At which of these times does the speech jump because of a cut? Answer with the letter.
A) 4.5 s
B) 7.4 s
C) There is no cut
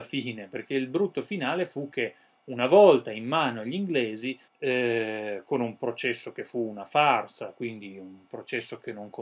A